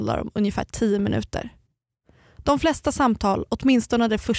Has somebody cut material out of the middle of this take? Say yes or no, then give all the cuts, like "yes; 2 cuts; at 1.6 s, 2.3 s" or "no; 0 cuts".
no; 0 cuts